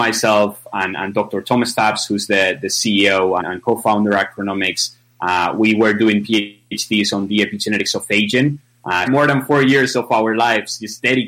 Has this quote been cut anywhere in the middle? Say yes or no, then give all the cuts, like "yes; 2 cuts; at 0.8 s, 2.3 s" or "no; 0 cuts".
yes; 2 cuts; at 3.4 s, 9.1 s